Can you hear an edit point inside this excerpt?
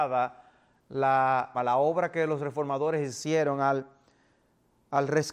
yes; 1 cut; at 1.5 s

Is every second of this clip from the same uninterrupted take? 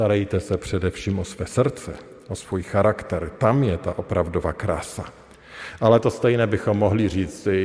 yes; 0 cuts

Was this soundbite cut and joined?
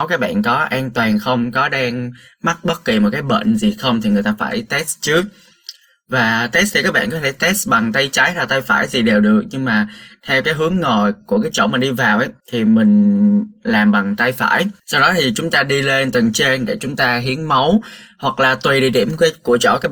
yes; 2 cuts; at 12.4 s, 14.8 s

